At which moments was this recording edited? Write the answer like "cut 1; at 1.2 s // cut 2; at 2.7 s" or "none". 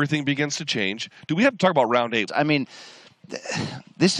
cut 1; at 2.3 s